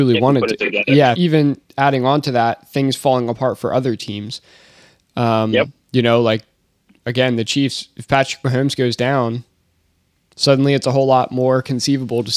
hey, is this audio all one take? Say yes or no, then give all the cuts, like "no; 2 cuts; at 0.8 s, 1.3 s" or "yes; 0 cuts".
no; 1 cut; at 1.1 s